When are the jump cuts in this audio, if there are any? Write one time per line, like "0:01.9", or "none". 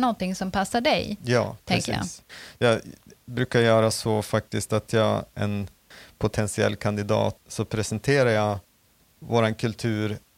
0:05.3
0:07.4

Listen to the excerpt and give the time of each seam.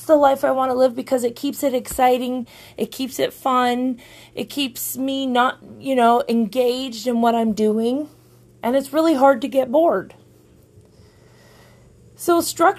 none

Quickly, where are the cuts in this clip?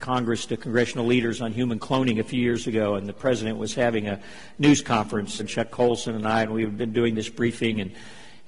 0:05.4

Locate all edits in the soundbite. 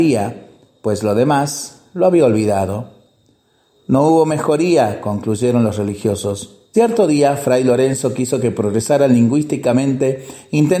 0:06.7

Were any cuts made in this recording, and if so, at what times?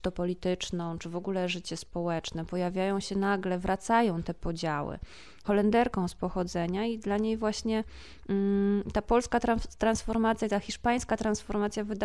0:05.4

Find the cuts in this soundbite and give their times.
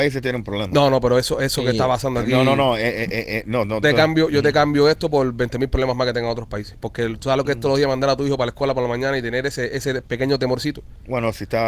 0:03.8

